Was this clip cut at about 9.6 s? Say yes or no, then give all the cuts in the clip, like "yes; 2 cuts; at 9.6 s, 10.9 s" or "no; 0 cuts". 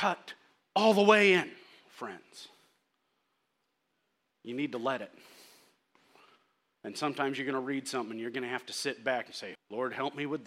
yes; 1 cut; at 9.6 s